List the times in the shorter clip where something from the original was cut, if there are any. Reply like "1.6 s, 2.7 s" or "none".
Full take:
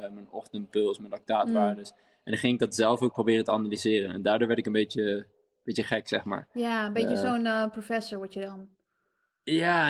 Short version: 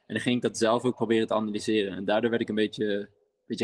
none